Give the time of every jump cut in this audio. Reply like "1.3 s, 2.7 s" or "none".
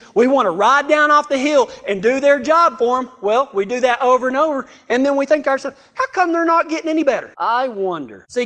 7.3 s